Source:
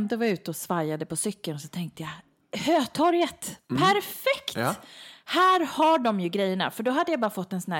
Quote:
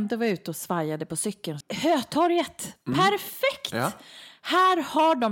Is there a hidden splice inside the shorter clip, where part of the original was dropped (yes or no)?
yes